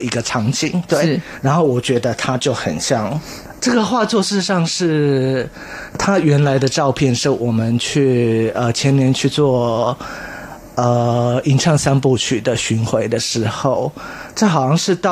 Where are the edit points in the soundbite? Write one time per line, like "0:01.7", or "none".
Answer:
0:03.6